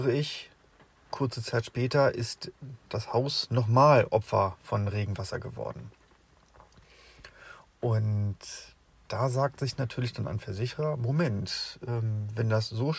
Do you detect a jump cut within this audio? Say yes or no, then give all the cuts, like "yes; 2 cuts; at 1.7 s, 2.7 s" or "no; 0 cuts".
no; 0 cuts